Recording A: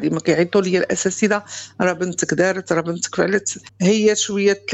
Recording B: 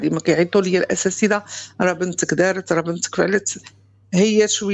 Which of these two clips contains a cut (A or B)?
A